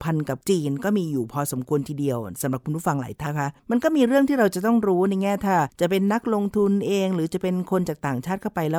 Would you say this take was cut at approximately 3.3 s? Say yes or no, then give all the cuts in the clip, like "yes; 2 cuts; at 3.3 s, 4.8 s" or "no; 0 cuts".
yes; 1 cut; at 3.3 s